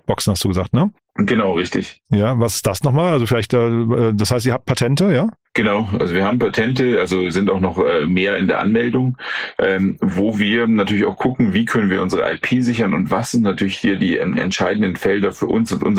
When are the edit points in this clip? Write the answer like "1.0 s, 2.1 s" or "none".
none